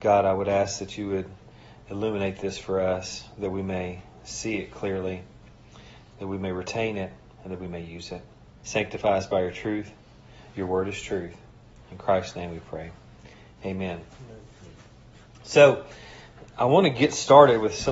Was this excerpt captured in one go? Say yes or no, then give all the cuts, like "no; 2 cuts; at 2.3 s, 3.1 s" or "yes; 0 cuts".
no; 1 cut; at 8.6 s